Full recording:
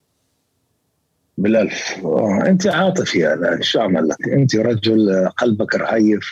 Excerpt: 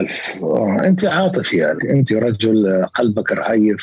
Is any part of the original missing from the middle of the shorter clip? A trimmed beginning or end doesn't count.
yes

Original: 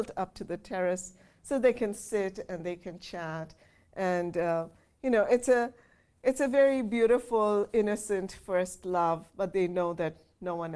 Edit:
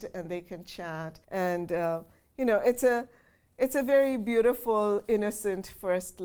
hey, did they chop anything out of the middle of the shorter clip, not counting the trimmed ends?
yes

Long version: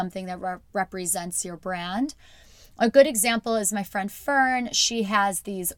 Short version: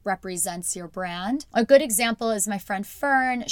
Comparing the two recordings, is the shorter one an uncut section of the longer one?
no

